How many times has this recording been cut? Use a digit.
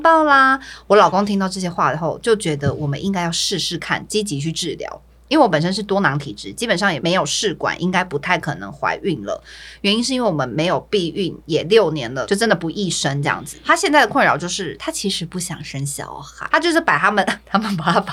1